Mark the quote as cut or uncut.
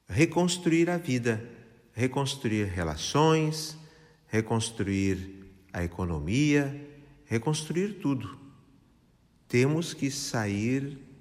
uncut